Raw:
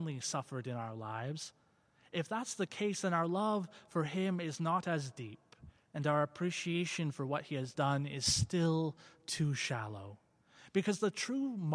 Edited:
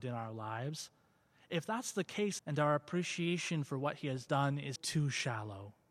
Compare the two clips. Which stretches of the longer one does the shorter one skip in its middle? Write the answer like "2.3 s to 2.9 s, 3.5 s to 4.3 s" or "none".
3.0 s to 5.9 s, 8.2 s to 9.2 s